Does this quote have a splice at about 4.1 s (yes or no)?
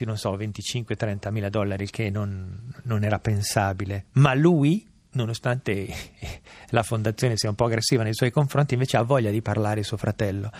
no